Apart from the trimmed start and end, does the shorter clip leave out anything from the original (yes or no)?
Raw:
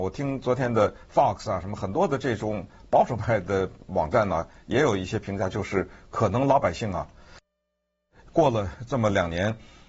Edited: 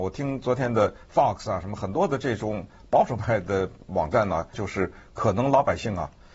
yes